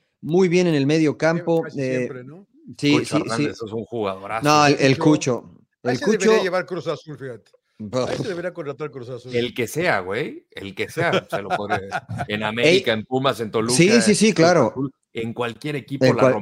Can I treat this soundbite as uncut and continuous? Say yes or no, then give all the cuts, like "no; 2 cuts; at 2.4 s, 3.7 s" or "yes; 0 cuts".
yes; 0 cuts